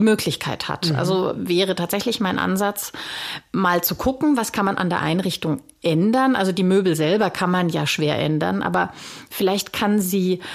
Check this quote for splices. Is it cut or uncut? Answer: uncut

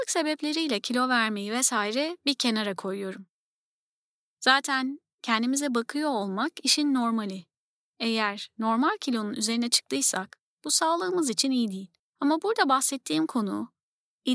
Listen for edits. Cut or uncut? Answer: cut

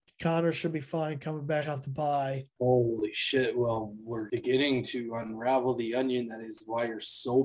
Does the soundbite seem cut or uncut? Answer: cut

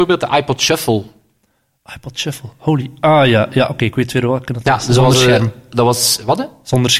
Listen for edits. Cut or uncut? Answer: uncut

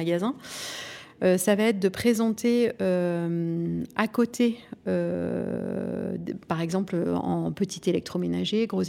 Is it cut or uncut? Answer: uncut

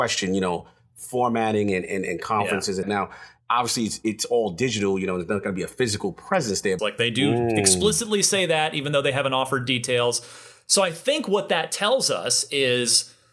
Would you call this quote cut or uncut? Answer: cut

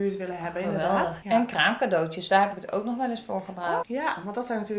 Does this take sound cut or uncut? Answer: cut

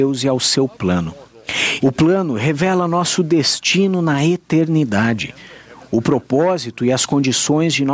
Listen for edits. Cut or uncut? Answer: cut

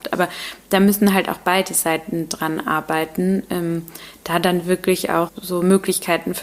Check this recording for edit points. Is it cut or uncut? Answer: cut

